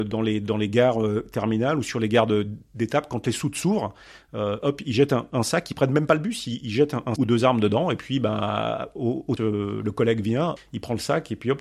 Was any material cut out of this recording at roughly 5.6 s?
no; 3 cuts; at 7.2 s, 9.4 s, 10.6 s

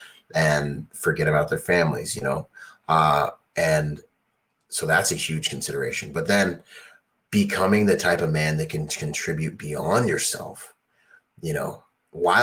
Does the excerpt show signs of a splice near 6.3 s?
no; 0 cuts

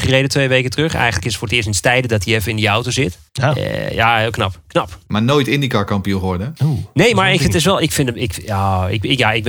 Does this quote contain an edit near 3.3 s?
yes; 2 cuts; at 3.3 s, 7.8 s

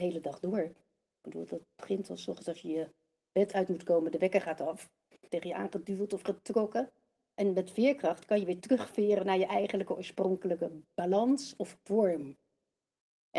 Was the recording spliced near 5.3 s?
yes; 1 cut; at 5.3 s

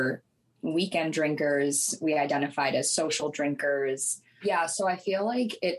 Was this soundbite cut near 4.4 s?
yes; 1 cut; at 4.4 s

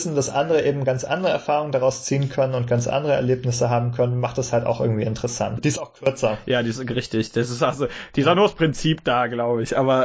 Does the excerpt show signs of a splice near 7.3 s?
no; 1 cut; at 5.6 s

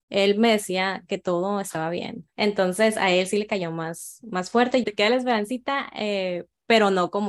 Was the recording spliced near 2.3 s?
yes; 2 cuts; at 2.3 s, 4.8 s

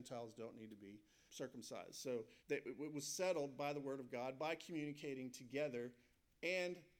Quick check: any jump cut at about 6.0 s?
no; 2 cuts; at 1.3 s, 2.4 s

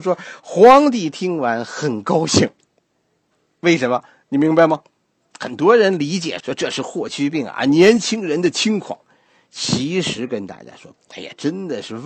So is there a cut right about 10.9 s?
yes; 2 cuts; at 6.4 s, 10.9 s

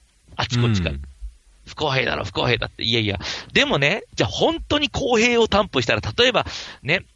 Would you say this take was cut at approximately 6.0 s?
no; 1 cut; at 4.1 s

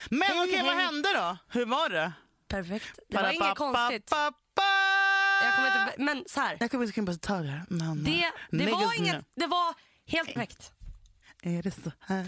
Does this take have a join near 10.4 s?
yes; 1 cut; at 10.4 s

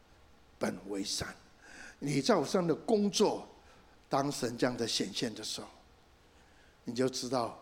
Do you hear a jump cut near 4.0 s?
yes; 1 cut; at 4.0 s

